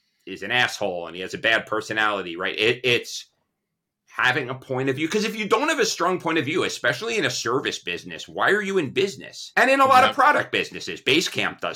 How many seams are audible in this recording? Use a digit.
1